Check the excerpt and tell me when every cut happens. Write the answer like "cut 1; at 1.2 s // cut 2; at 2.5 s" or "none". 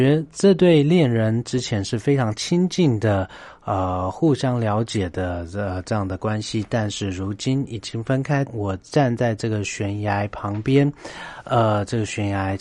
cut 1; at 8.5 s